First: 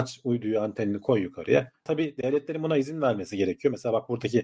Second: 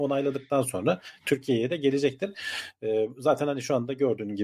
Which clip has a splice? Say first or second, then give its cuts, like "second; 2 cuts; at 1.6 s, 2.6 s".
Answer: first; 1 cut; at 1.9 s